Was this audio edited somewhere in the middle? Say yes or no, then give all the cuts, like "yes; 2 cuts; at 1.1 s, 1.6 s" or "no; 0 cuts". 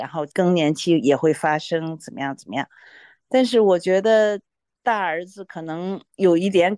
no; 0 cuts